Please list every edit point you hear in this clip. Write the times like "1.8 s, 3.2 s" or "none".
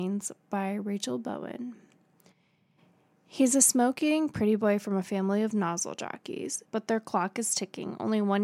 6.6 s